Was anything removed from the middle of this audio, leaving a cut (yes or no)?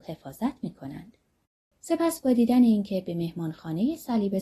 yes